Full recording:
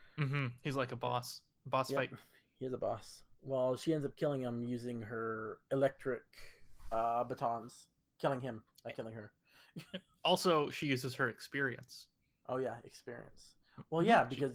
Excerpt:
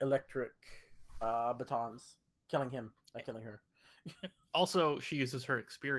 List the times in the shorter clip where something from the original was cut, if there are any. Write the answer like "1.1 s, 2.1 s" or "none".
none